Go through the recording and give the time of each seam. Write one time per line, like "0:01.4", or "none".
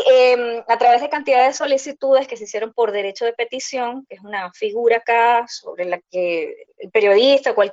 none

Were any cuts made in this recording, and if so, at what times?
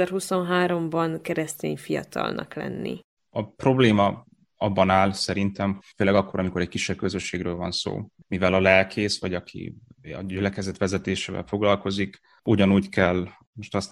0:03.2
0:05.8

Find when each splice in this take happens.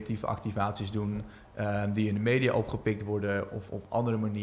none

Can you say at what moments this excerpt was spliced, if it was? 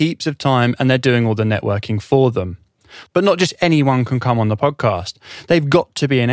none

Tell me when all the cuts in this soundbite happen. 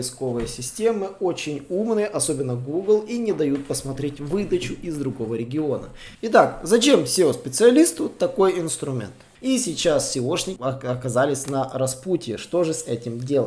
0:06.1
0:09.4
0:10.6

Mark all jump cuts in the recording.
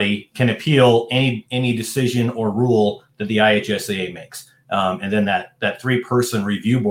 none

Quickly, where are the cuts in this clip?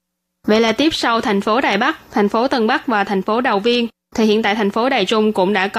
none

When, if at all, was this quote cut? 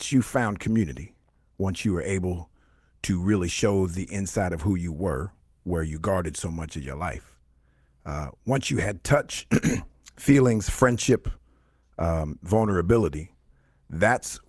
none

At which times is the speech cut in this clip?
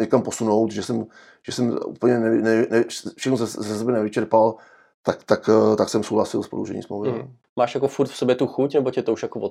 0:07.4

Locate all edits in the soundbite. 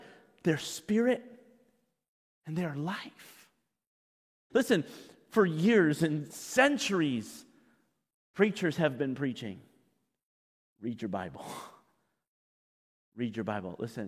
0:04.5

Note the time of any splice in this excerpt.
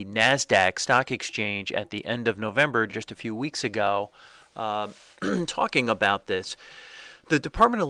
none

